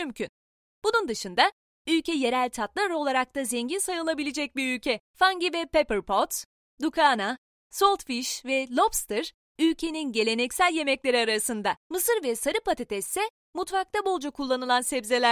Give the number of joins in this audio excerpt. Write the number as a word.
two